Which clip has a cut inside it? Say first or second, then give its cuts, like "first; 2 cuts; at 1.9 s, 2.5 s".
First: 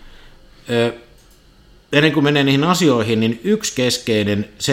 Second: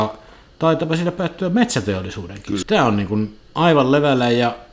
second; 1 cut; at 2.6 s